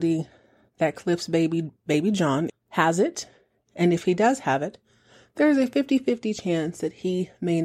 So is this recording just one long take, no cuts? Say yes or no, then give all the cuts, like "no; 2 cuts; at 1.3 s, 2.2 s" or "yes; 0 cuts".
no; 1 cut; at 2.5 s